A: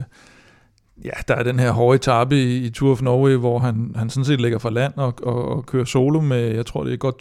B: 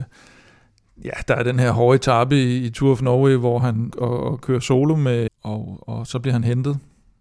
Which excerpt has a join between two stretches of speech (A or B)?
B